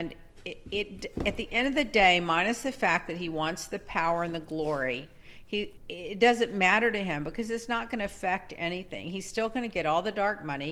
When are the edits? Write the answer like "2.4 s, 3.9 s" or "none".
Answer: 5.8 s